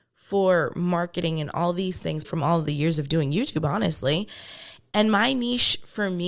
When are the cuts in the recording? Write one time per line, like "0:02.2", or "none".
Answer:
0:02.2
0:04.9